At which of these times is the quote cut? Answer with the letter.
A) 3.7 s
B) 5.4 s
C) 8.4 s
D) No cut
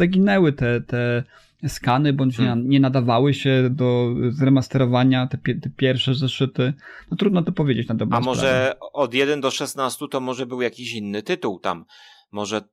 A